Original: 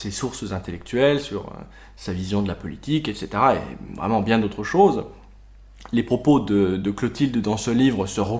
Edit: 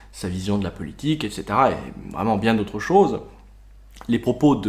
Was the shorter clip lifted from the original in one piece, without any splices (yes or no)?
yes